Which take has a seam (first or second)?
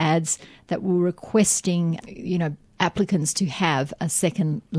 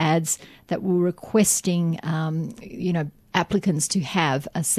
first